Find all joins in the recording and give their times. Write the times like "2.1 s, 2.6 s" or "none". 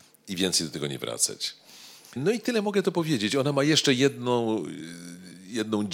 2.2 s